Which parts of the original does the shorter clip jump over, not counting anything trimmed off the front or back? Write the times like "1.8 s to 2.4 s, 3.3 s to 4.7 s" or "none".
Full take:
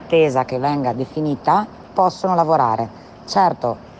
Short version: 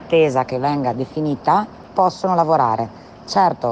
none